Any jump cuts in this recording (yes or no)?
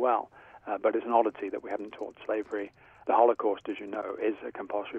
yes